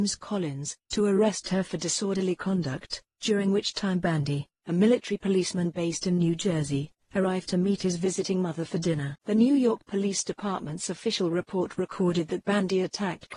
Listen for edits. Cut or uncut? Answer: uncut